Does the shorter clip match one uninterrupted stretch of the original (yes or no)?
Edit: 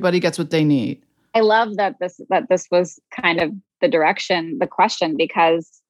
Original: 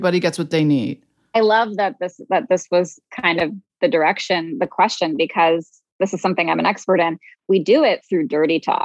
yes